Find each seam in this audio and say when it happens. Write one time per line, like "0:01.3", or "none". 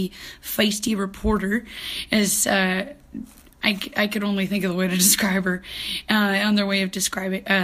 none